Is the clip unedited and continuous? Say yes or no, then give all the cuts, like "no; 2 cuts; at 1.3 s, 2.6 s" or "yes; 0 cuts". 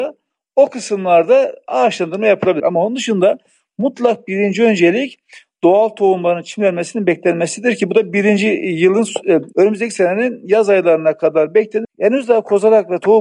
no; 2 cuts; at 2.6 s, 11.8 s